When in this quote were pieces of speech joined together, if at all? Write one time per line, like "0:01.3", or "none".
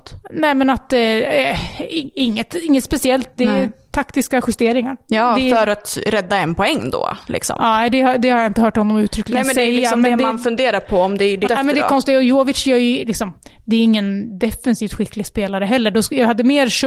0:11.5

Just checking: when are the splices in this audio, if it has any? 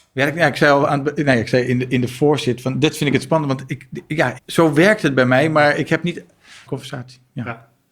0:04.4
0:06.7

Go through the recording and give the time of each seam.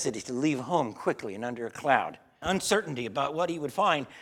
0:02.4

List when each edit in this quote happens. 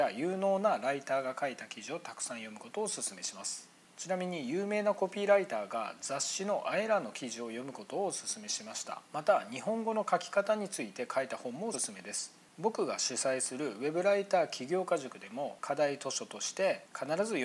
0:09.1
0:11.7

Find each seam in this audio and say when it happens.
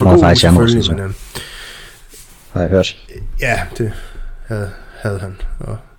none

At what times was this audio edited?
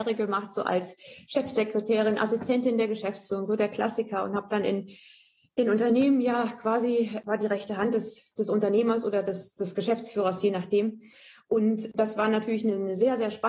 none

